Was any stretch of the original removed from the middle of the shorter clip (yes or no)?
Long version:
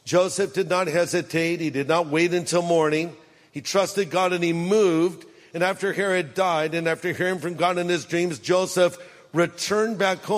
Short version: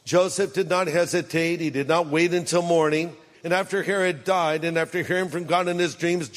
yes